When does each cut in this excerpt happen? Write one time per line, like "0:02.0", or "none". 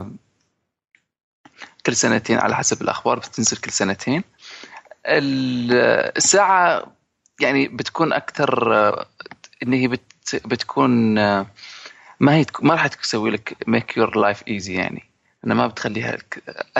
none

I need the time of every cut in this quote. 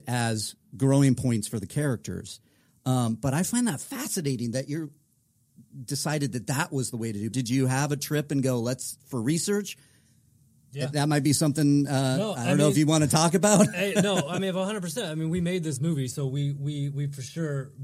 0:07.3

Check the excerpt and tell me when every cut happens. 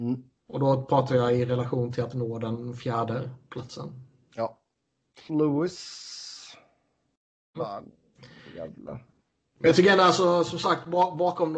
0:05.3
0:07.5

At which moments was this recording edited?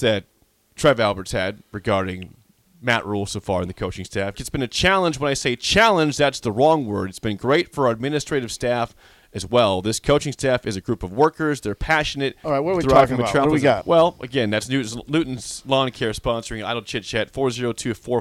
0:04.3
0:12.4
0:13.8

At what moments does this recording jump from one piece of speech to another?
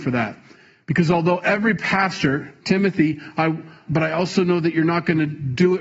0:03.9

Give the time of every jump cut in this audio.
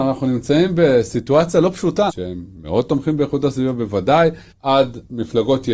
0:02.1
0:04.5

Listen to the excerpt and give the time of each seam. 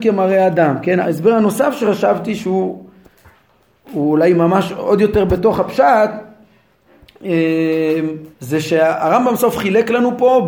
0:01.0
0:08.3
0:09.4

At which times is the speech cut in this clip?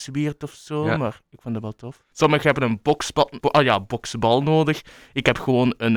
0:02.1
0:03.4

